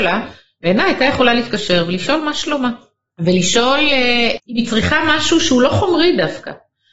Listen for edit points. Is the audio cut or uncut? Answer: uncut